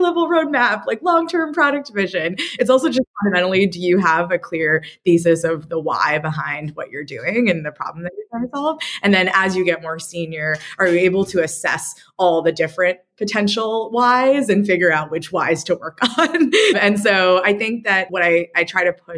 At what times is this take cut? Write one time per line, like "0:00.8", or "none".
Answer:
none